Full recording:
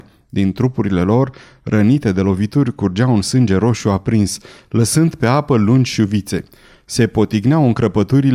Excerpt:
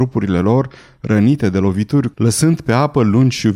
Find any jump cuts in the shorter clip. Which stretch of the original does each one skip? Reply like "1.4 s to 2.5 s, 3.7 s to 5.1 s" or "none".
2.8 s to 4.7 s